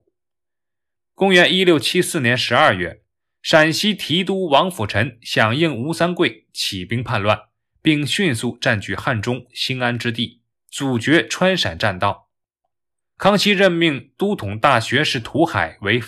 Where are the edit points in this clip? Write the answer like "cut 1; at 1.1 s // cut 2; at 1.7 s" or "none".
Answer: none